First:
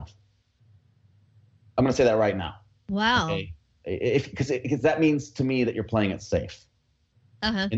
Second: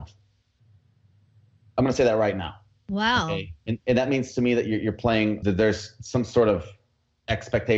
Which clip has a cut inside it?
second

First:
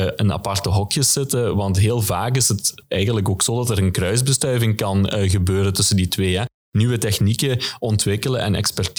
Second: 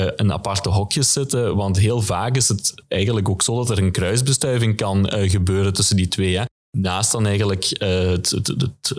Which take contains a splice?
second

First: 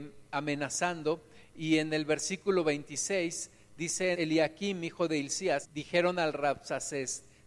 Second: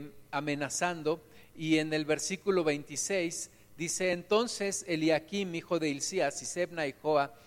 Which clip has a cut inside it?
first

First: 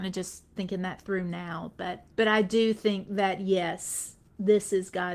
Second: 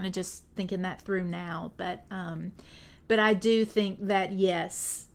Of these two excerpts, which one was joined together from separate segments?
first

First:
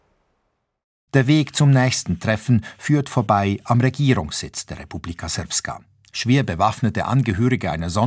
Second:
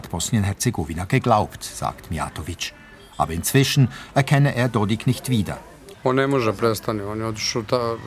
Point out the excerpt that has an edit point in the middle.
second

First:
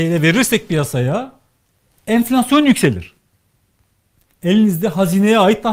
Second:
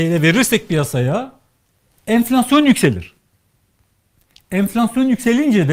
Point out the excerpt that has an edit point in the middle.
first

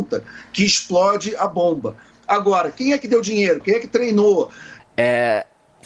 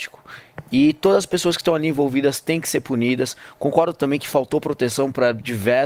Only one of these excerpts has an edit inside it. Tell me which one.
first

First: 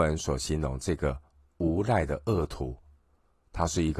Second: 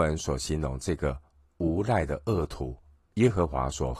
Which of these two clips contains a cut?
second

